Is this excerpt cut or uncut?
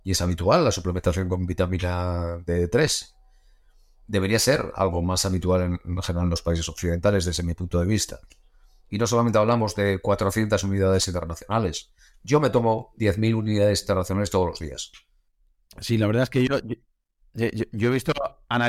uncut